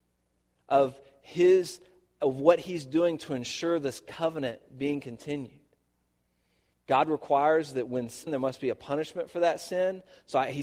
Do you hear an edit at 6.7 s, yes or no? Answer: yes